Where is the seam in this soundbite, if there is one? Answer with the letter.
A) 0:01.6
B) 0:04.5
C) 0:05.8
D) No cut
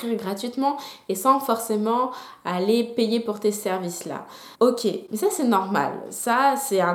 B